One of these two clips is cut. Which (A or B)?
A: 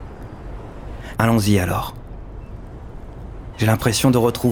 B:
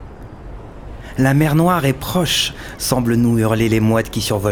A